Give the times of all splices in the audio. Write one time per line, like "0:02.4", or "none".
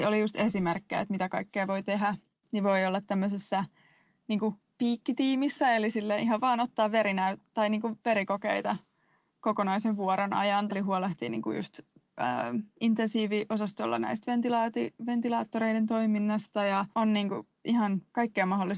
0:10.7
0:12.7
0:16.9